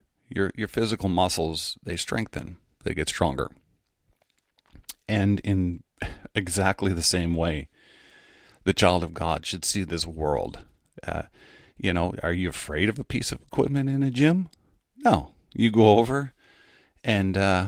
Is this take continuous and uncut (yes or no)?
yes